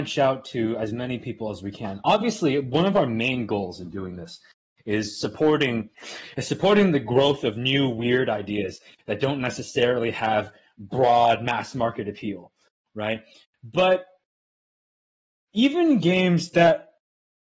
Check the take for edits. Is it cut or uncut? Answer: uncut